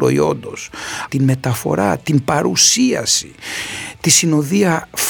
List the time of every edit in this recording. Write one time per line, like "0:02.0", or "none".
0:01.1